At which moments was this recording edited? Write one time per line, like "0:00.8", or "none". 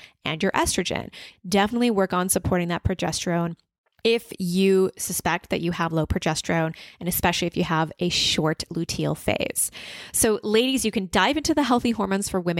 0:01.3

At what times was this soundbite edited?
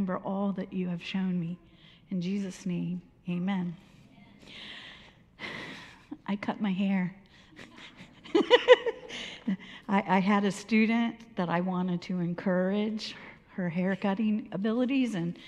none

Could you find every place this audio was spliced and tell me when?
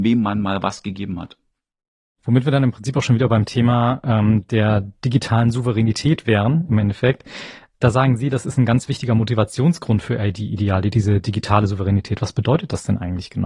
none

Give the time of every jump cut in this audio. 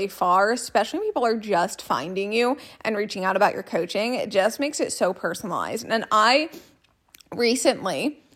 none

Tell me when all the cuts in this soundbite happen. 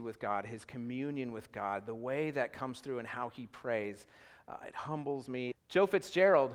0:05.5

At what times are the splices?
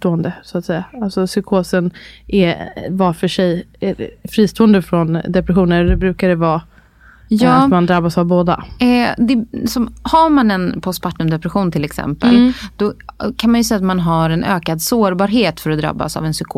none

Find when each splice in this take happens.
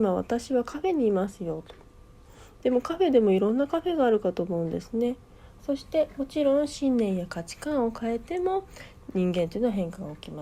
0:05.6

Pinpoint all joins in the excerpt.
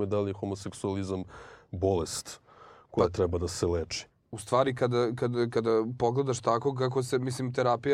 none

